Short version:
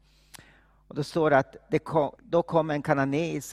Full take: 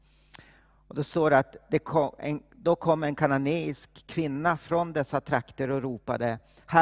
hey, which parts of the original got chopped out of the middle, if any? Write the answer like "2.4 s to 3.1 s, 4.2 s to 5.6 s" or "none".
2.2 s to 2.5 s